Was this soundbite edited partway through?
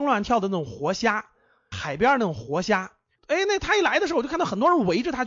yes; 1 cut; at 3.1 s

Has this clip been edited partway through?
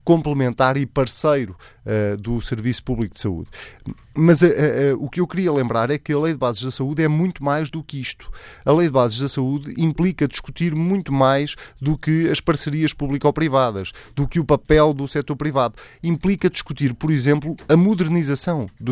no; 0 cuts

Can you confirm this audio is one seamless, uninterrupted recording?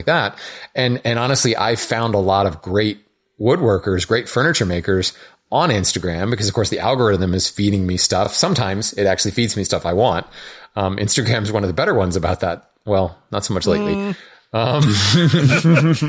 yes; 0 cuts

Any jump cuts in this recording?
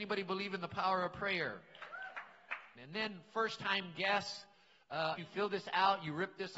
yes; 2 cuts; at 2.7 s, 5.2 s

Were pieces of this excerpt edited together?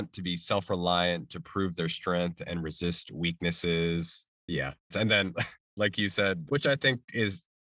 yes; 2 cuts; at 4.9 s, 6.5 s

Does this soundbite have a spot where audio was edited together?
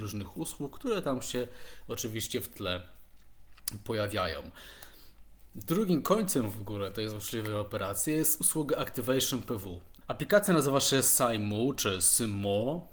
yes; 1 cut; at 10.0 s

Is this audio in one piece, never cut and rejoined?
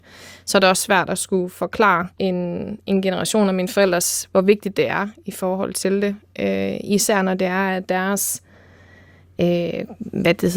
no; 1 cut; at 2.1 s

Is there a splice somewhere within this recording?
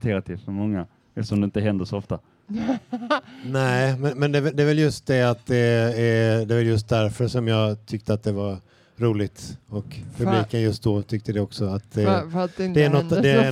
no; 0 cuts

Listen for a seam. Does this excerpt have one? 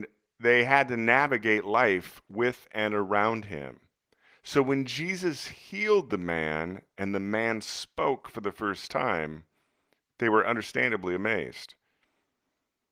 no; 0 cuts

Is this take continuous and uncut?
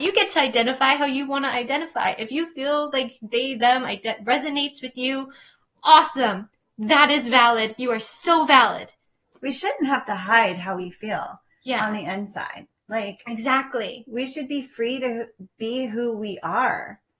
yes; 0 cuts

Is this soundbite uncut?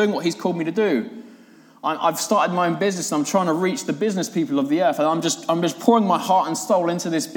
yes; 0 cuts

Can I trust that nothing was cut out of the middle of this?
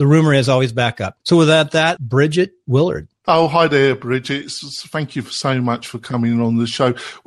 no; 1 cut; at 2.0 s

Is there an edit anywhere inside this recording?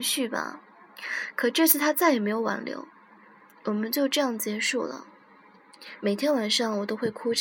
yes; 1 cut; at 6.0 s

